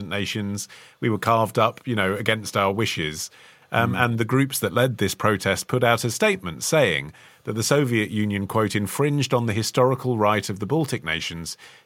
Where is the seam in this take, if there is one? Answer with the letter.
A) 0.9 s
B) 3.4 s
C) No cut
C